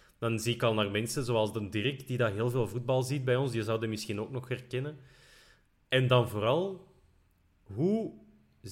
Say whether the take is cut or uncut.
uncut